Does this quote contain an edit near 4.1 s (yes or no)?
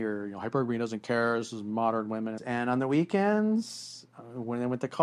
no